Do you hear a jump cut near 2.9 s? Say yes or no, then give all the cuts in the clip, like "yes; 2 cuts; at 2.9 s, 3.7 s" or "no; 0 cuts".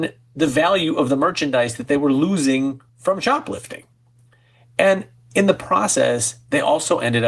yes; 1 cut; at 2.9 s